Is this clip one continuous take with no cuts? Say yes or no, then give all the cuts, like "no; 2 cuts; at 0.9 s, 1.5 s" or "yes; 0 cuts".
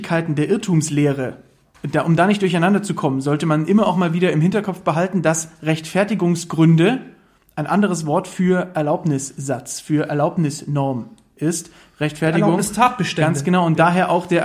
yes; 0 cuts